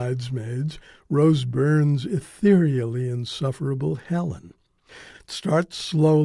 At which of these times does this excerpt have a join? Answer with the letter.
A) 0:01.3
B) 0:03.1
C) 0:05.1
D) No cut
C